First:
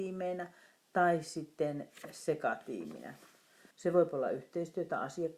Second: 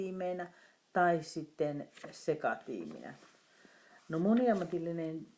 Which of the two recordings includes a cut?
first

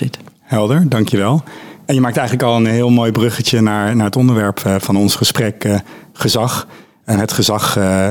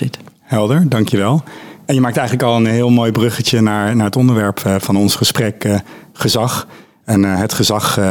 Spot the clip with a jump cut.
first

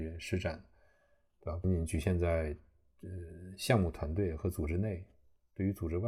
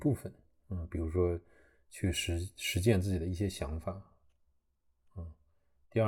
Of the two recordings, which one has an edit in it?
first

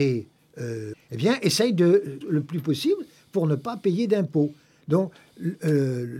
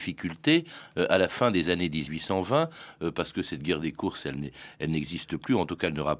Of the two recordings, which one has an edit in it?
first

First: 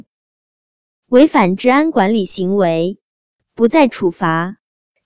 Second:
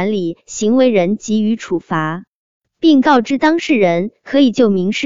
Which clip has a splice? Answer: first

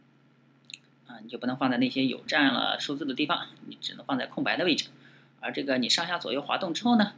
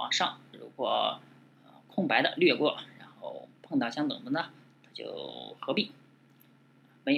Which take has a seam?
first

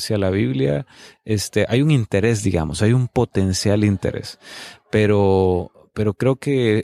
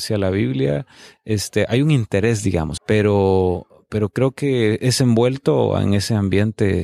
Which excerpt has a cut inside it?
second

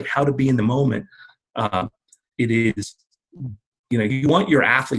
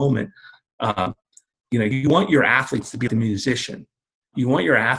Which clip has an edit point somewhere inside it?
second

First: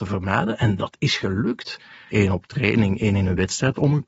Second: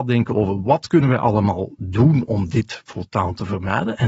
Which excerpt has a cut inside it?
first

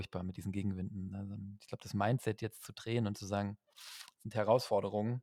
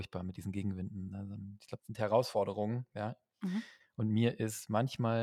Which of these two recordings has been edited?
second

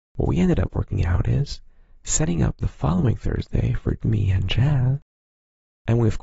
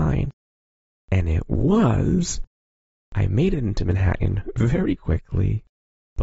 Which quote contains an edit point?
first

